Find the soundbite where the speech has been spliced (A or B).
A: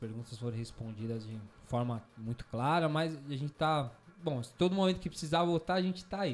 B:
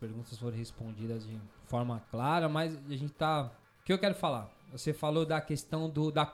B